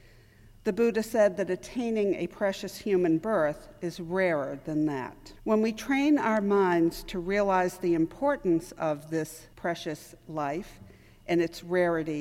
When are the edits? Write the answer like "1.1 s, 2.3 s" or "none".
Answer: 5.4 s, 9.5 s